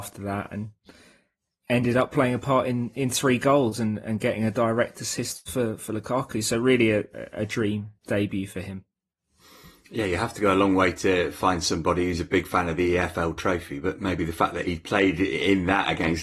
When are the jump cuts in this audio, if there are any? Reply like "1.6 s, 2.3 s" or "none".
none